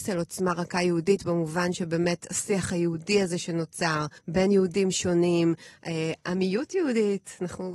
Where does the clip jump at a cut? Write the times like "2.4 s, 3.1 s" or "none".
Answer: 4.2 s